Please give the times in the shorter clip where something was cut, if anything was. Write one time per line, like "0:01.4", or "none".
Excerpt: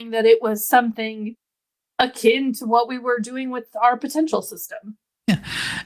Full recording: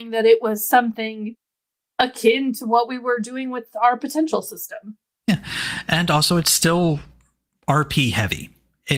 none